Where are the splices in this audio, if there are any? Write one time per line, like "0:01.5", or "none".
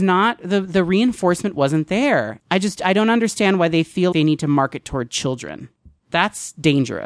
0:02.4
0:04.1